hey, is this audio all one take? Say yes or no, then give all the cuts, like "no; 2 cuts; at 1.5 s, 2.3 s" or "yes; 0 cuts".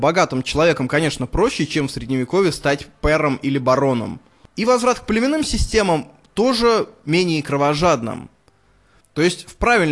no; 1 cut; at 9.0 s